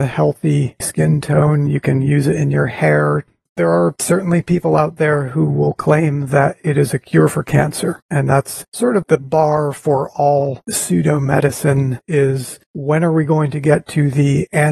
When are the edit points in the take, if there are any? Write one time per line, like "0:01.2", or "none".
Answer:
none